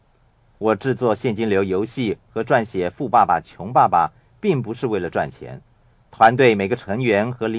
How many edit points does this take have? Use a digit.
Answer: 1